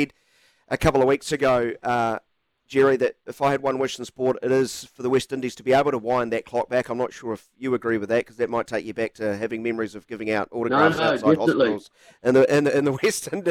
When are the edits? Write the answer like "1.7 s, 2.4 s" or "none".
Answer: none

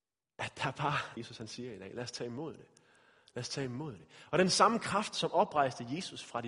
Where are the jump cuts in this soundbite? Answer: 1.2 s

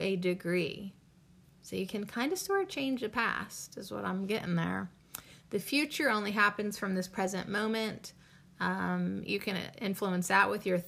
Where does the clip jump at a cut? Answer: 9.3 s

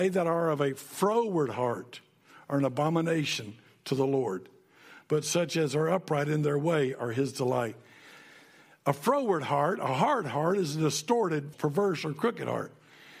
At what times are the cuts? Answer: 11.5 s

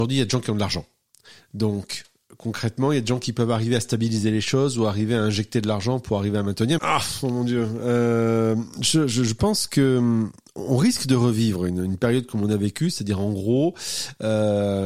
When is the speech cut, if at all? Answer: 6.8 s

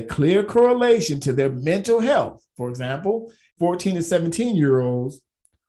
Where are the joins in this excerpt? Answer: 3.5 s

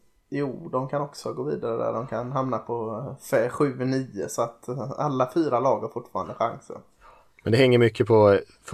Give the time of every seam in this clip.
none

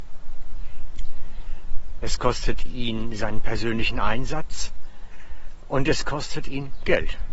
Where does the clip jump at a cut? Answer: 2.0 s

